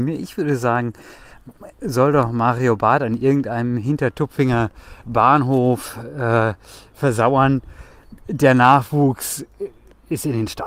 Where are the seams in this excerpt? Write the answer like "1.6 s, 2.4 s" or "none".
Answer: none